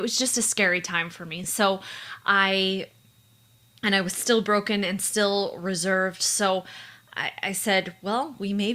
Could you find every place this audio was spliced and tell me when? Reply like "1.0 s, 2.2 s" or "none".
none